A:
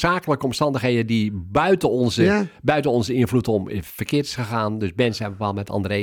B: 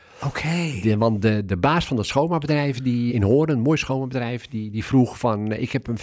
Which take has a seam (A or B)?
B